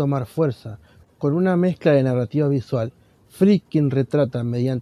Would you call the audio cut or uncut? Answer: uncut